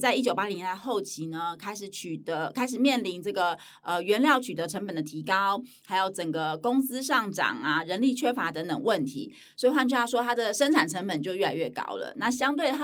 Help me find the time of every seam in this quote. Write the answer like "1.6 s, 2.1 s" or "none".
none